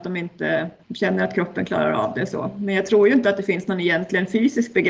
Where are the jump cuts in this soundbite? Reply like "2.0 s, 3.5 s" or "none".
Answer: none